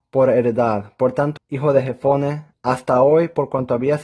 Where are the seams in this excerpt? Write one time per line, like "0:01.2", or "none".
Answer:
0:01.4
0:02.5